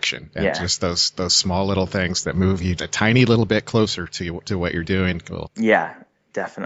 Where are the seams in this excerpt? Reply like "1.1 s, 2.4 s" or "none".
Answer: 2.8 s, 5.5 s